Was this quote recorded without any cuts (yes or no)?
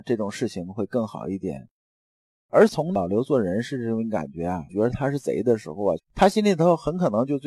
no